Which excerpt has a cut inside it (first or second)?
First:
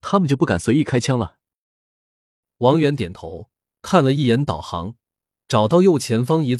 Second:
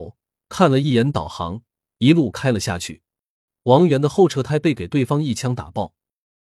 second